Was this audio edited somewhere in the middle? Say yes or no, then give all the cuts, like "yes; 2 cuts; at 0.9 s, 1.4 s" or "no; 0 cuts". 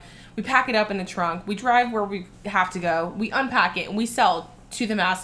no; 0 cuts